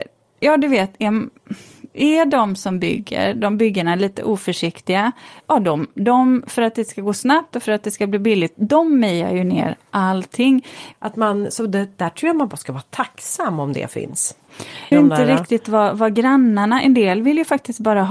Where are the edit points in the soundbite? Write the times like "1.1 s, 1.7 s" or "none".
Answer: 10.9 s, 14.9 s